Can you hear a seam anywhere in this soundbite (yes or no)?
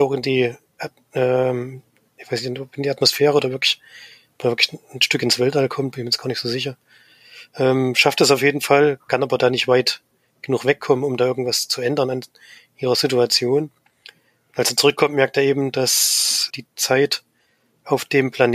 yes